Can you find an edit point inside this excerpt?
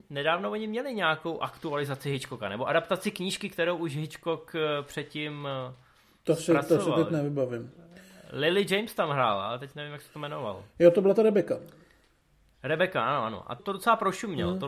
yes; 1 cut; at 13.6 s

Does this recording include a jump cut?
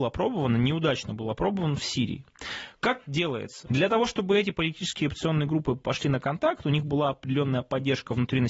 yes; 1 cut; at 3.7 s

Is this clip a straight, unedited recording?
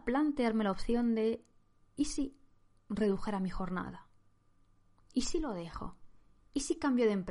yes; 0 cuts

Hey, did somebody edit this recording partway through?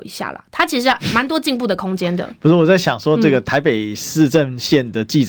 no; 0 cuts

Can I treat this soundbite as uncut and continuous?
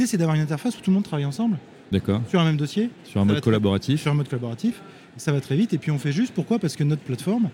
yes; 0 cuts

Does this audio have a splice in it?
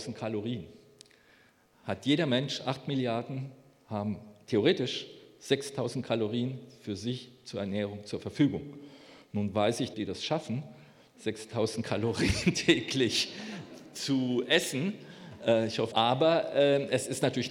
yes; 2 cuts; at 9.9 s, 15.9 s

